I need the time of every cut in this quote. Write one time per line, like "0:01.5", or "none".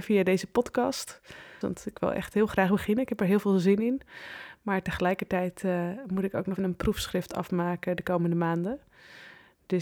0:01.6
0:06.6